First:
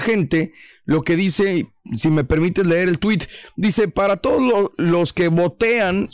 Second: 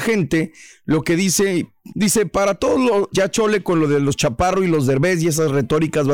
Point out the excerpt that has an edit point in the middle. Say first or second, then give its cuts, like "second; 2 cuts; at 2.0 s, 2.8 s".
second; 2 cuts; at 1.9 s, 3.1 s